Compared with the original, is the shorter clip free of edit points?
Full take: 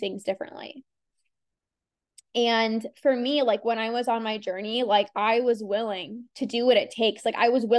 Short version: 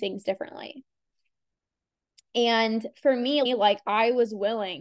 no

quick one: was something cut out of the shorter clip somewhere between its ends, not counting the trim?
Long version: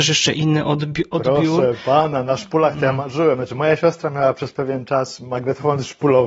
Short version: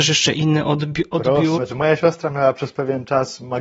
yes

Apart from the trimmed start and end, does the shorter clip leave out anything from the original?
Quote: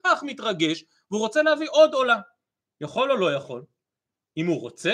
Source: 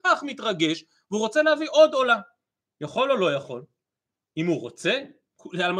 no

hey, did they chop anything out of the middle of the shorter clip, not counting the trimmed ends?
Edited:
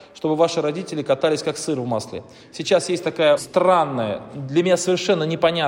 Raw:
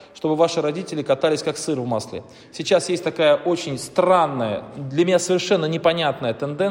yes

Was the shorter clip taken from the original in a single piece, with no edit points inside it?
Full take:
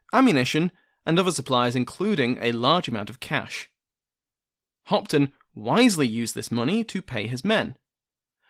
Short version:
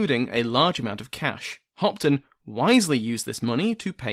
no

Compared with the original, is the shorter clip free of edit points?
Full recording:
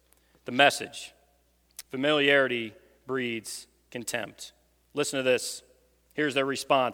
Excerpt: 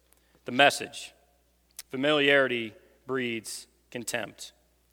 yes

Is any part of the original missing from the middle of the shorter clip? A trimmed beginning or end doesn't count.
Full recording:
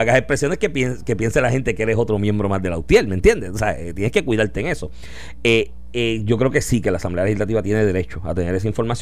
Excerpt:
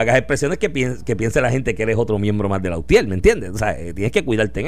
no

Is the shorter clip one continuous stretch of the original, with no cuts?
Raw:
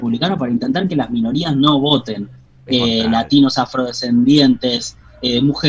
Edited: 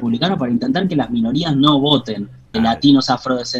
no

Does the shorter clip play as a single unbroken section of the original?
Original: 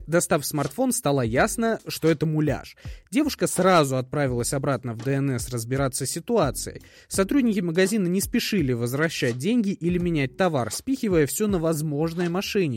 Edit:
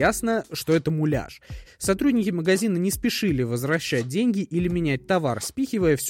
no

